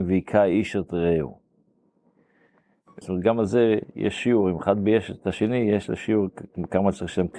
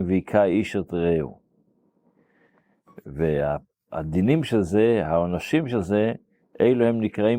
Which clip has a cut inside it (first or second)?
first